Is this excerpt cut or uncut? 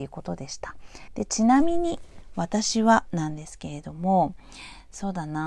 uncut